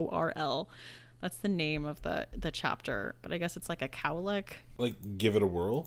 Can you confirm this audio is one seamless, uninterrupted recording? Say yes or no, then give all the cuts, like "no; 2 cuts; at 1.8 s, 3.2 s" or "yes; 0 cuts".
yes; 0 cuts